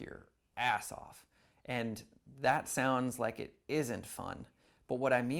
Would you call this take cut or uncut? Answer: uncut